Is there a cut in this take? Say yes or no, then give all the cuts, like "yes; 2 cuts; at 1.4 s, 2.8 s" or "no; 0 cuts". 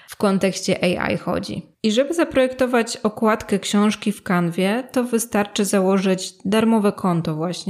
yes; 1 cut; at 1.7 s